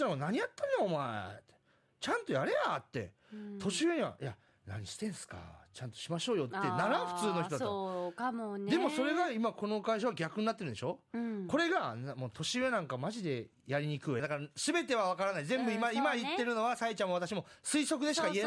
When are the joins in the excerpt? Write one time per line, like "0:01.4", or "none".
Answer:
0:14.2